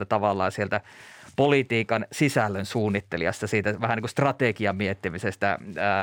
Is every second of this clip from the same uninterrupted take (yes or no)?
yes